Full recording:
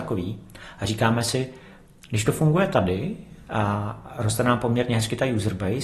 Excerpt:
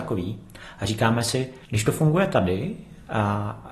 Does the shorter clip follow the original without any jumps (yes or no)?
no